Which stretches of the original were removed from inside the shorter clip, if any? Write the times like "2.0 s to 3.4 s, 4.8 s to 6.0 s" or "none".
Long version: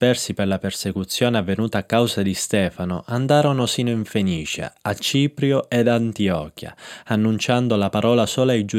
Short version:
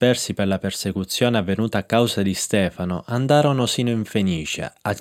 none